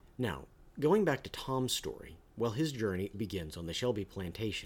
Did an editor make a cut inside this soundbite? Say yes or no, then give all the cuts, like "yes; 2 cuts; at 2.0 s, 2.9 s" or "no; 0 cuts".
yes; 1 cut; at 3.1 s